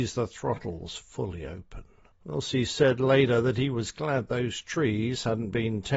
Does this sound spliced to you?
yes; 1 cut; at 2.1 s

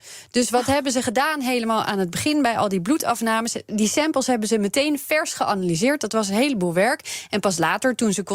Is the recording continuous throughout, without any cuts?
yes; 0 cuts

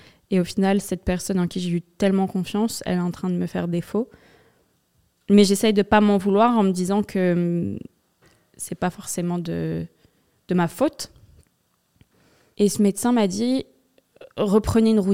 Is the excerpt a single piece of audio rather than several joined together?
no; 1 cut; at 12.5 s

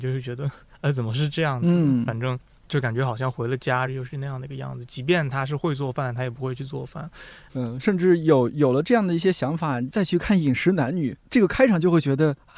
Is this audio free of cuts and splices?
no; 2 cuts; at 3.9 s, 7.5 s

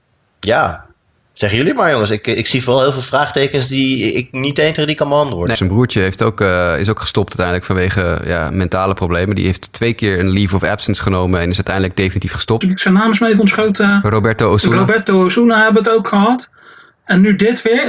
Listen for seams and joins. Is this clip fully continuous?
no; 2 cuts; at 5.5 s, 12.6 s

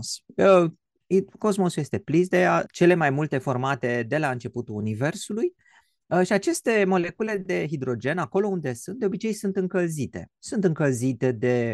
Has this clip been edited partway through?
yes; 1 cut; at 2.7 s

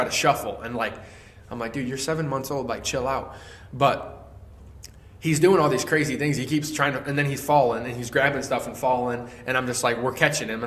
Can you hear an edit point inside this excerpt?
no; 0 cuts

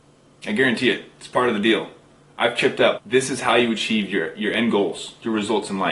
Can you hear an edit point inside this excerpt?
yes; 1 cut; at 2.9 s

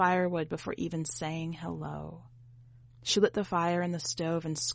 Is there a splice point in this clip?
no; 0 cuts

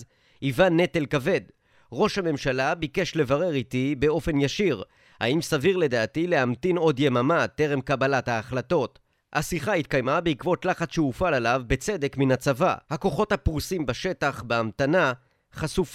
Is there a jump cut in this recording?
yes; 1 cut; at 12.8 s

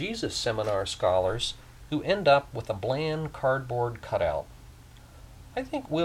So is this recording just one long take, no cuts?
no; 1 cut; at 1.9 s

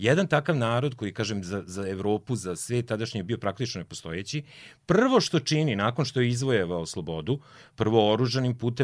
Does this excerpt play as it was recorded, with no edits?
yes; 0 cuts

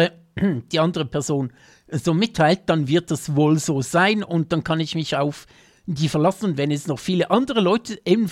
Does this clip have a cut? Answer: no; 0 cuts

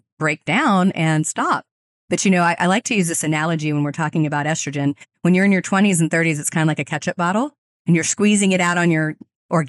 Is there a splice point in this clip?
no; 0 cuts

